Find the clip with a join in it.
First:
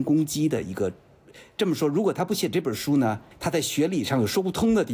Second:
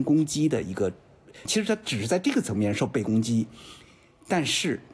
second; 1 cut; at 1.4 s

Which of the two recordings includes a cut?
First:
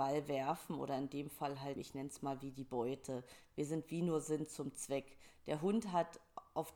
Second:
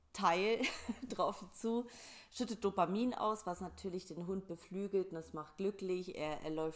first; 1 cut; at 1.8 s

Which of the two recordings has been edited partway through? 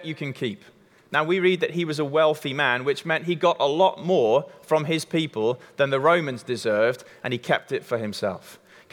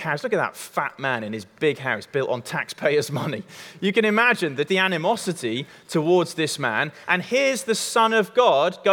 second; 1 cut; at 4.7 s

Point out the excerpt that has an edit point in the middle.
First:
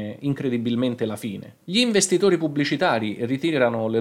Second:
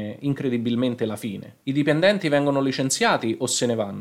first; 1 cut; at 1.6 s

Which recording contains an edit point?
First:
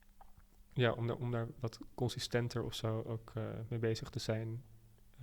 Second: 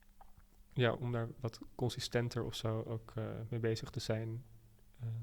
second; 1 cut; at 0.9 s

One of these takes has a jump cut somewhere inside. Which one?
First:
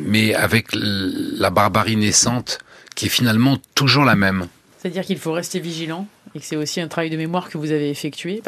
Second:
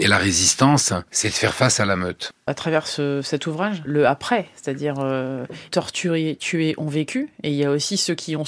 second; 2 cuts; at 3.8 s, 5.7 s

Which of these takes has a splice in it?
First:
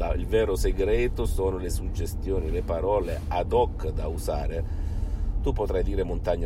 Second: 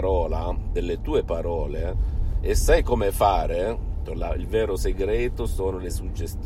second; 1 cut; at 4.0 s

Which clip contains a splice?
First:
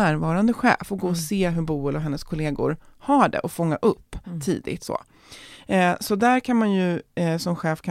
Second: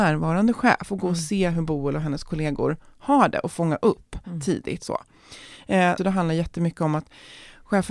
second; 1 cut; at 6.0 s

